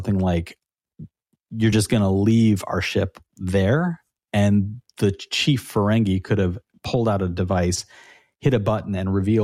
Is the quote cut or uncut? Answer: uncut